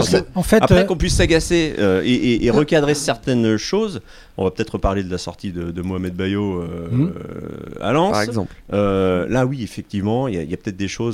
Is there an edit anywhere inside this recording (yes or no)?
no